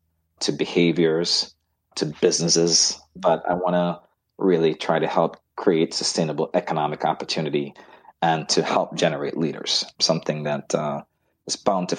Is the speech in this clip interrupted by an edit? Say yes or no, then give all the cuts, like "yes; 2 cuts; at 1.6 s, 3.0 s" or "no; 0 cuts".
yes; 1 cut; at 9.9 s